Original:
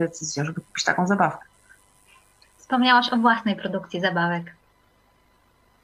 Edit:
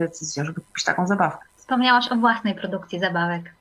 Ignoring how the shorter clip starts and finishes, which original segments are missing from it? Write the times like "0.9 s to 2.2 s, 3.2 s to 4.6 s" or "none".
1.5 s to 2.5 s